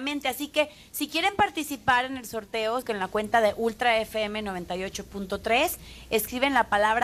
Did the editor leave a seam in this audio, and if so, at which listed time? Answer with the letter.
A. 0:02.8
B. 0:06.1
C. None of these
A